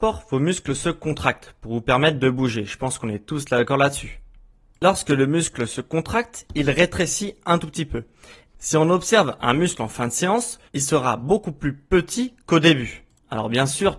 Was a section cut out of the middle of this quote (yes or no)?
yes